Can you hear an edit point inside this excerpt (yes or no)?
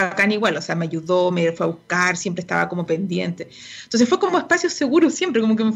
no